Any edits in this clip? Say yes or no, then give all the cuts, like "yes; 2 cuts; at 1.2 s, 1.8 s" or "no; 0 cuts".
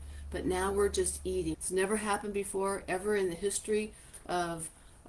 yes; 1 cut; at 1.5 s